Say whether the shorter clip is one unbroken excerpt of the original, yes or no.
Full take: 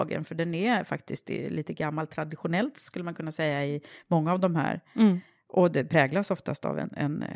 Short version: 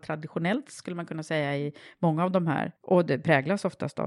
no